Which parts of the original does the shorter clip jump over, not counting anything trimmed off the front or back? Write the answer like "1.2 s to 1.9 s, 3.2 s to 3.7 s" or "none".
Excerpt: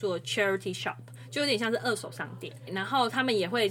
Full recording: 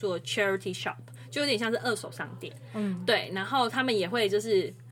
2.7 s to 3.3 s